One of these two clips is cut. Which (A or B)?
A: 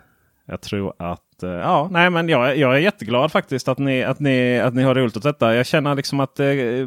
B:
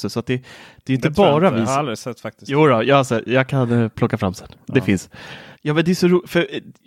B